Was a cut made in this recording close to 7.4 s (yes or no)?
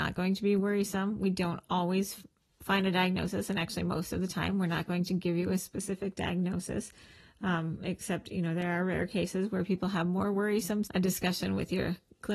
no